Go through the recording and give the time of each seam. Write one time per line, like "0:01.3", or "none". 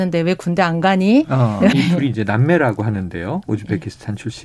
0:01.7